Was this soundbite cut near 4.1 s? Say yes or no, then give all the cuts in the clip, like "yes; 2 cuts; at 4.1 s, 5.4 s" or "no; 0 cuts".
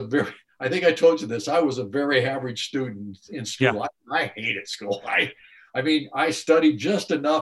no; 0 cuts